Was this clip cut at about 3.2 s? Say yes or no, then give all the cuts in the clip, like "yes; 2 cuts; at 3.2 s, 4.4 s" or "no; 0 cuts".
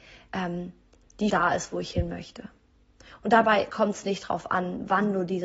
no; 1 cut; at 1.3 s